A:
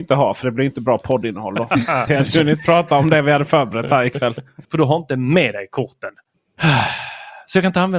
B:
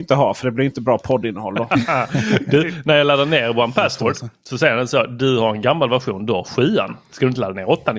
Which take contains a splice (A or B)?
A